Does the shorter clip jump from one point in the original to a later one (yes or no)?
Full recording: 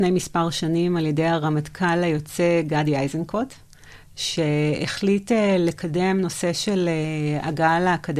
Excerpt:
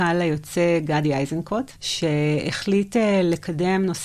yes